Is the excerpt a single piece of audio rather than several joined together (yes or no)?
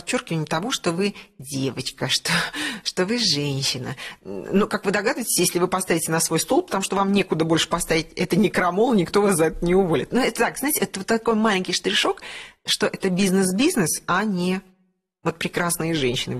yes